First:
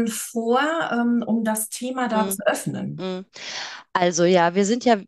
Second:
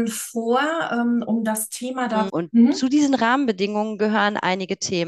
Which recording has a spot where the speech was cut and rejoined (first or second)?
second